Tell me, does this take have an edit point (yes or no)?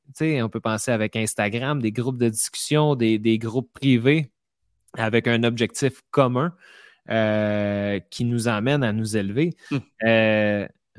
yes